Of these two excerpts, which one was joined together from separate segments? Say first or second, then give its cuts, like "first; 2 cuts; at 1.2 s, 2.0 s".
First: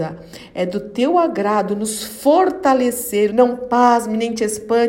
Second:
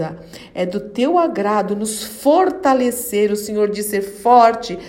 first; 1 cut; at 3.3 s